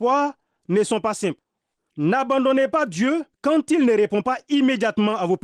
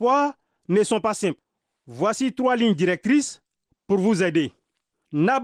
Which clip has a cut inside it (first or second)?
first